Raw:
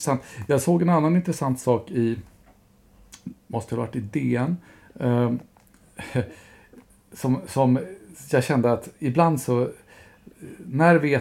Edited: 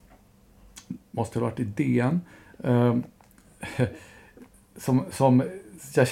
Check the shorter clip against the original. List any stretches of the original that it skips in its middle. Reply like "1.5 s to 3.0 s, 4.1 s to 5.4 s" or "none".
none

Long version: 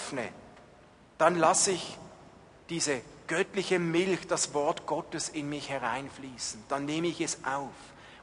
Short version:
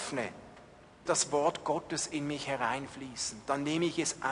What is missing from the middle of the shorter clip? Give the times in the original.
1.1 s to 4.3 s

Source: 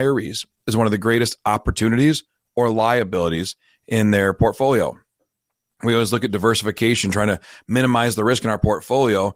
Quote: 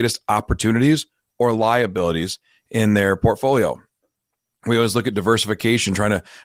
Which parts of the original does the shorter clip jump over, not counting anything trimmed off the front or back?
none

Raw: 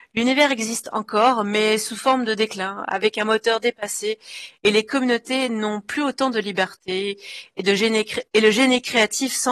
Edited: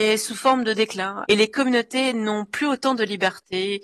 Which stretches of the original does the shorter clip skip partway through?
2.9 s to 4.6 s

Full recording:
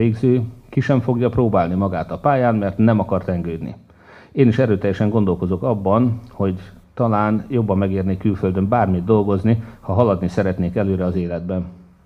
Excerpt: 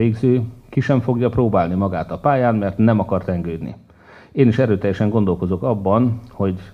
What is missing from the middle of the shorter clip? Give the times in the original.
none

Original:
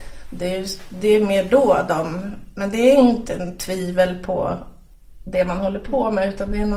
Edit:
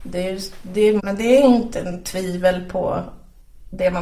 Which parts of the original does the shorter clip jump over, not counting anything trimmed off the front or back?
1.3 s to 2.5 s

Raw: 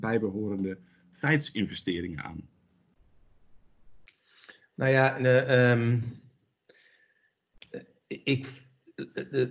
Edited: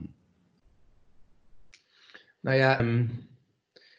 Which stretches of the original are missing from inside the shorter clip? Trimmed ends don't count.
5.1 s to 5.7 s

